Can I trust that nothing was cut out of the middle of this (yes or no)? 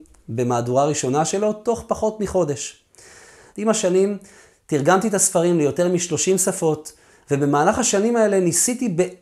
no